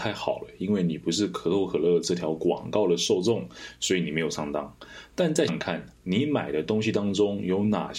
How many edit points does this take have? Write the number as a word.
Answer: one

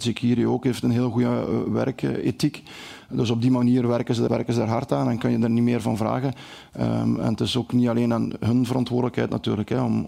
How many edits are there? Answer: one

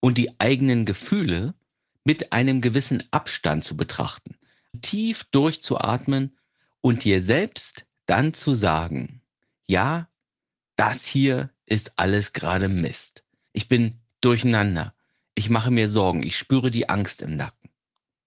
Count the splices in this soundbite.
two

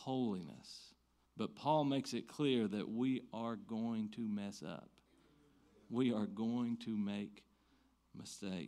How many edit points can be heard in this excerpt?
one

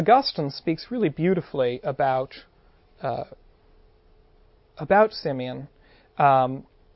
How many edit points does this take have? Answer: zero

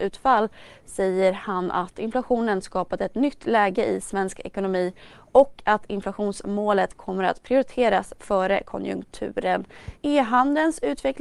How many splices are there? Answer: one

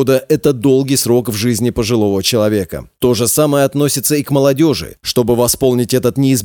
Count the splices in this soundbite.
one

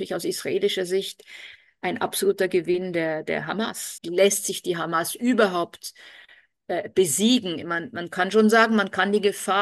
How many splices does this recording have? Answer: one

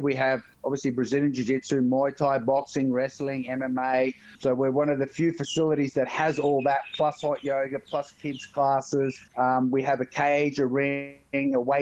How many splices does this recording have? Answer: zero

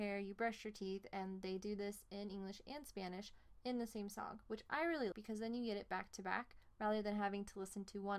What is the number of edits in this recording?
one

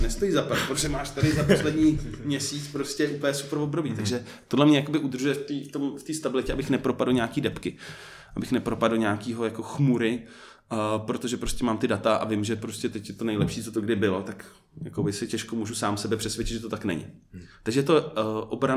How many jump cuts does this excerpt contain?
zero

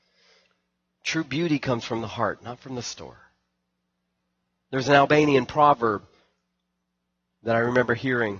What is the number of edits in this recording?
zero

